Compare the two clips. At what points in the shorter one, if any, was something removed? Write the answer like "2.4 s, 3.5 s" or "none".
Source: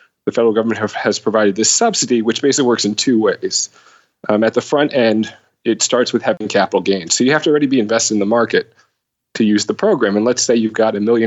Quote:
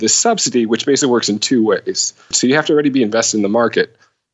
2.3 s